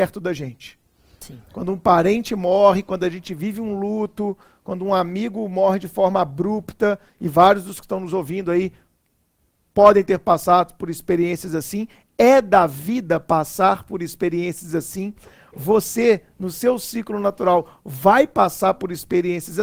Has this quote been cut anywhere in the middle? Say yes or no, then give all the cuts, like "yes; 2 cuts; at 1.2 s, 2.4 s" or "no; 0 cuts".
no; 0 cuts